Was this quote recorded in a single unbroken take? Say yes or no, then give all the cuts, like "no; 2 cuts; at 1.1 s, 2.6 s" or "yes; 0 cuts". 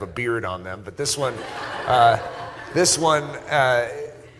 yes; 0 cuts